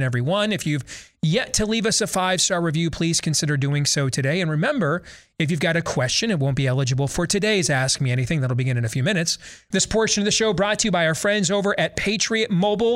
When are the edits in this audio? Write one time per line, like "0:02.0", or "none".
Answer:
0:09.7